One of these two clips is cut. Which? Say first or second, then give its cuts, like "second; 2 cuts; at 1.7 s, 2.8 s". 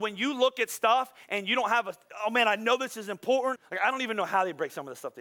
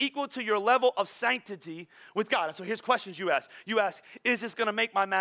first; 1 cut; at 3.6 s